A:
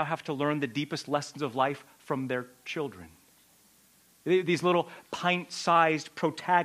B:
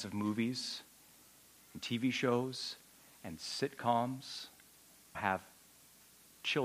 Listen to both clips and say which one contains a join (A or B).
B